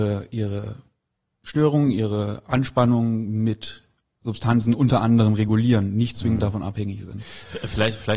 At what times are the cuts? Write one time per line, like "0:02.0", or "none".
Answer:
none